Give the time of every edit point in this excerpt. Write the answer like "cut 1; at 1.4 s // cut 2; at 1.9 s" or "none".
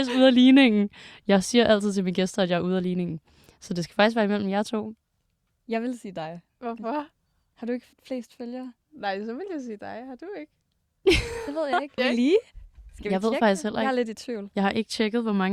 cut 1; at 7.9 s // cut 2; at 12.0 s